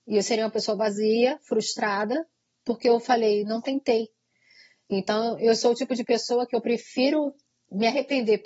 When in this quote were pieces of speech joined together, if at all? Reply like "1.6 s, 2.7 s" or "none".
none